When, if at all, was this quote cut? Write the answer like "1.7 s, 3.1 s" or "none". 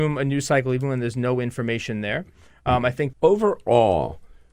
3.1 s